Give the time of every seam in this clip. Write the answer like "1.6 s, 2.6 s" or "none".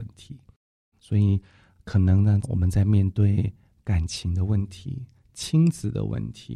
0.9 s, 2.4 s